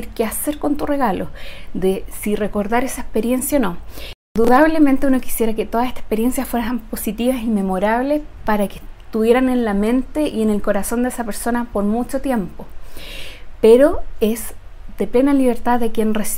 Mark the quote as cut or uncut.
cut